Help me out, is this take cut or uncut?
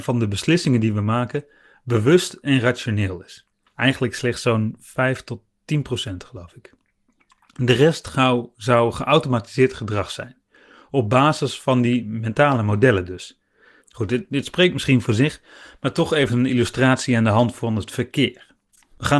cut